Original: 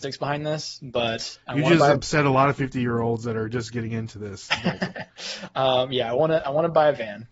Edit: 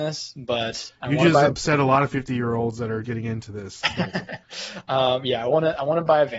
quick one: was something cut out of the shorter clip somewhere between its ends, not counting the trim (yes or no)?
yes